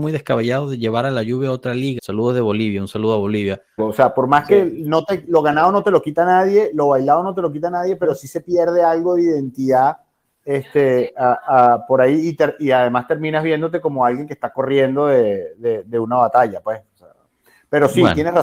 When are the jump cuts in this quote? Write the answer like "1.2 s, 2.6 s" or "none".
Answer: 2.0 s, 3.8 s